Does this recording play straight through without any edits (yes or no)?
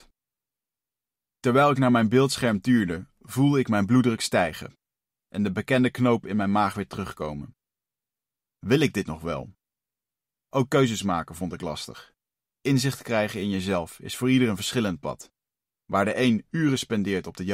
no